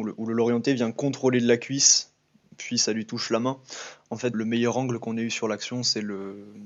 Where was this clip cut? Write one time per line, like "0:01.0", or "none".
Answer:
0:04.3

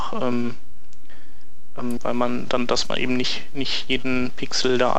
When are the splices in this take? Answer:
0:02.0

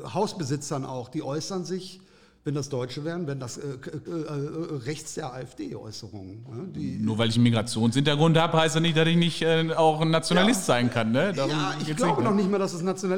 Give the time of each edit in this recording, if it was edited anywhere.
0:04.1

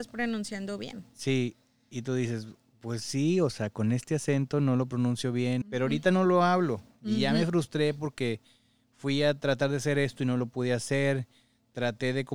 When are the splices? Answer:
0:05.6

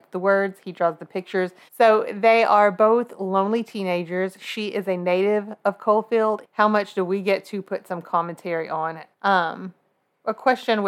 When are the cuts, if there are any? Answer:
0:01.7
0:06.4
0:09.1

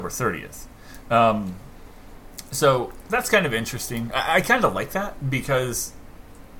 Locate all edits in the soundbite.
0:04.1

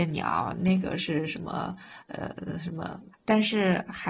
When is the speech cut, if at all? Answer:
0:03.1

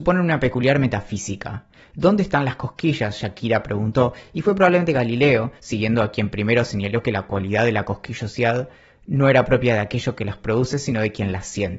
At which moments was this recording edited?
none

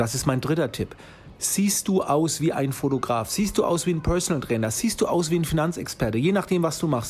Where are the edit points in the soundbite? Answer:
0:01.4

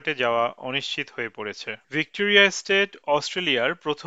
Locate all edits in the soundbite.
0:01.8

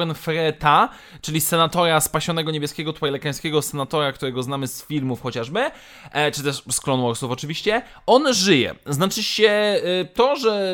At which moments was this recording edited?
none

